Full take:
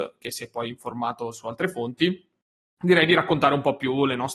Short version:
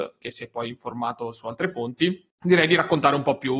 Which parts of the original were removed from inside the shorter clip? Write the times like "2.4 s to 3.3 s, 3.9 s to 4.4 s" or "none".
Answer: 2.3 s to 2.7 s